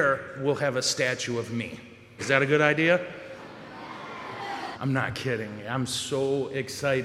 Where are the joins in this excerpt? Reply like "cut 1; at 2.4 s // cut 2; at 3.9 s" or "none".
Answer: cut 1; at 2.2 s // cut 2; at 4.7 s